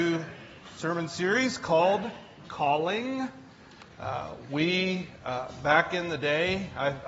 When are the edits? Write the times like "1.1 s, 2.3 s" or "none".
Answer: none